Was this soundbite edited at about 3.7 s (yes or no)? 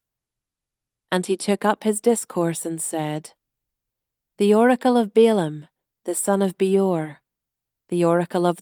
no